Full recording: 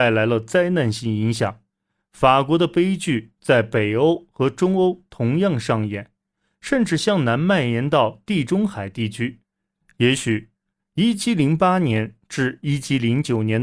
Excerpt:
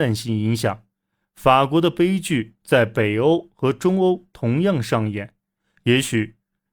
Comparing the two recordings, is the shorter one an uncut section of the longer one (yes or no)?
no